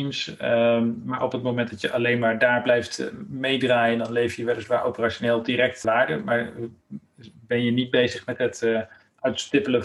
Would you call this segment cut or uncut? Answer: cut